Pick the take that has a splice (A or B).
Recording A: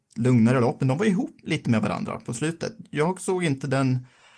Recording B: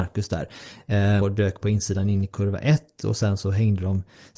B